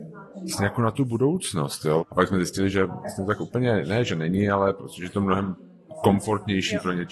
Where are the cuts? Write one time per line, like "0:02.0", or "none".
0:02.0